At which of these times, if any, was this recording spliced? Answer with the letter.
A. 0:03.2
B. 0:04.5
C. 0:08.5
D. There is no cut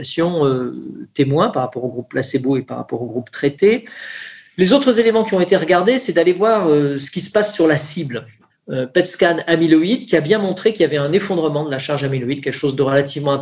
C